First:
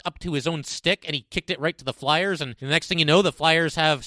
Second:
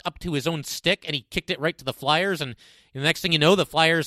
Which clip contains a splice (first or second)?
first